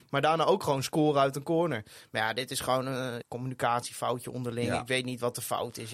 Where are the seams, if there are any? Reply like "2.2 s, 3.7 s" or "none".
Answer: 3.2 s